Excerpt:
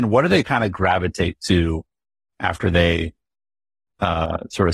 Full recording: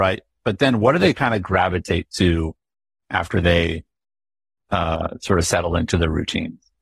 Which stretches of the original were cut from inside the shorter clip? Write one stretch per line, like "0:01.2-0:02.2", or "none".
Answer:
none